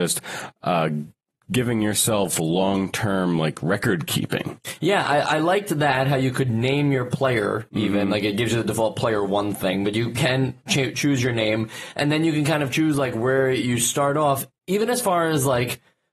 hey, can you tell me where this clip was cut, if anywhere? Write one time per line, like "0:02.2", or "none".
none